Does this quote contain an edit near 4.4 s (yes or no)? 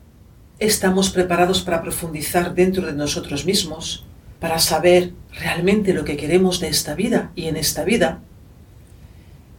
yes